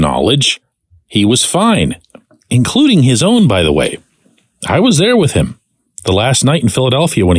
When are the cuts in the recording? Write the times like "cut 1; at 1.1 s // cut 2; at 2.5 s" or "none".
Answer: none